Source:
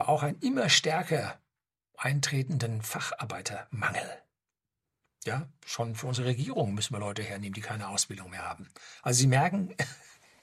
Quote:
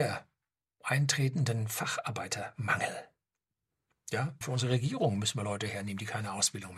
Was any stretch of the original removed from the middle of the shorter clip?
yes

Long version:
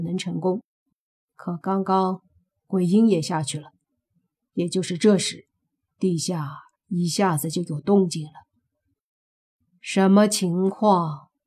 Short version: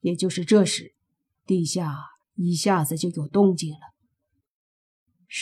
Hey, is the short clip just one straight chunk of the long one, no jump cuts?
yes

